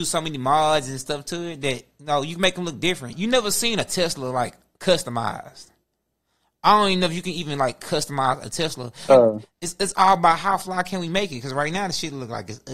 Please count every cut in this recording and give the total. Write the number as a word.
two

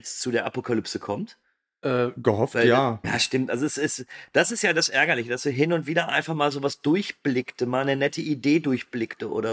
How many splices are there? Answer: one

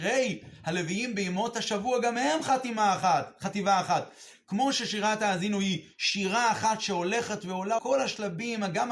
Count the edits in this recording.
one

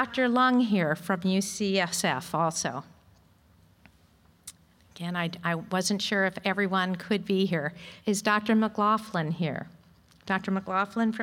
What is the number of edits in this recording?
one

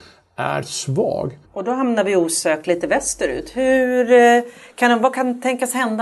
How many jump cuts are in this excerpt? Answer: one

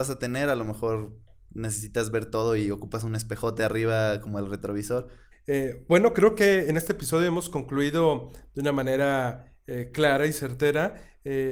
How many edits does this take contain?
one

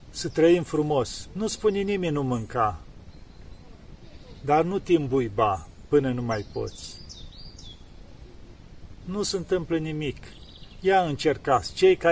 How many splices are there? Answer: zero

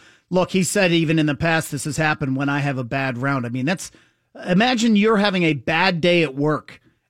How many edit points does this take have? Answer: zero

